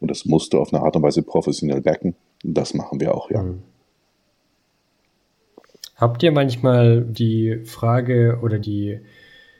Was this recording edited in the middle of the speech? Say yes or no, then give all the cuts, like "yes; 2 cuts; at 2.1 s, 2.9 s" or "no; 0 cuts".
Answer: yes; 2 cuts; at 7.1 s, 8.6 s